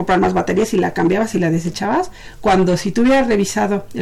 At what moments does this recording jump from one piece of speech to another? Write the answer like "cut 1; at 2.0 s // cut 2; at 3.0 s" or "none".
none